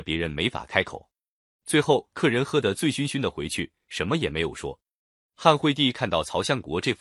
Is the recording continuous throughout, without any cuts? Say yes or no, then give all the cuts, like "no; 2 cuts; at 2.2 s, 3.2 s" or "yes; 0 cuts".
yes; 0 cuts